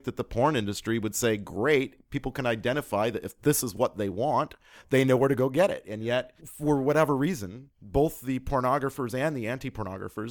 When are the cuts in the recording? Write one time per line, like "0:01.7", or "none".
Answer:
0:06.4